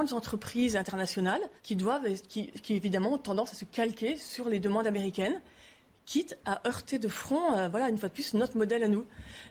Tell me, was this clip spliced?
yes; 1 cut; at 1.6 s

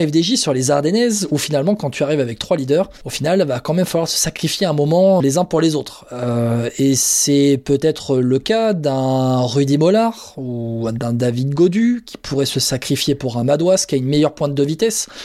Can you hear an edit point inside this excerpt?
yes; 2 cuts; at 3.0 s, 5.2 s

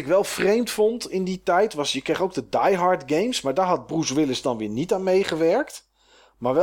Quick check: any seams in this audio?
no; 0 cuts

